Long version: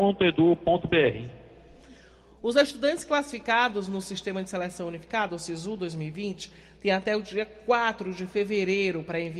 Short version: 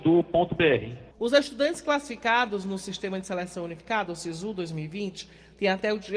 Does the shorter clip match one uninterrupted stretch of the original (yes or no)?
no